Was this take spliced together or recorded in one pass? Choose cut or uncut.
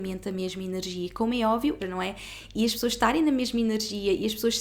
cut